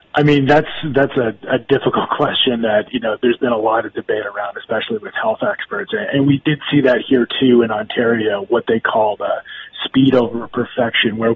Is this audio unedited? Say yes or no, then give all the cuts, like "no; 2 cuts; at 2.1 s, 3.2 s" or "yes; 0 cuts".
yes; 0 cuts